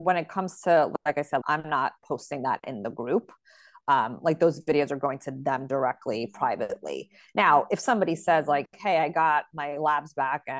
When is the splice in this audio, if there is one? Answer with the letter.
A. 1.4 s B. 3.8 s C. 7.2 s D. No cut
A